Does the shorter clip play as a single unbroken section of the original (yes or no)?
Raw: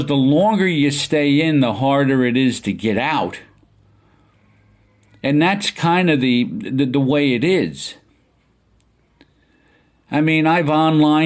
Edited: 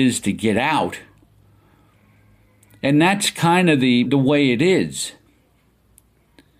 no